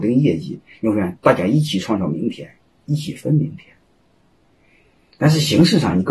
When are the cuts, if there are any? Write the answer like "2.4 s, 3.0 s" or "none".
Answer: none